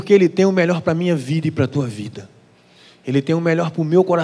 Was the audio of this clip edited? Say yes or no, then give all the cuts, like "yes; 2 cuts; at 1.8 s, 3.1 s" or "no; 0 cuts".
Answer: no; 0 cuts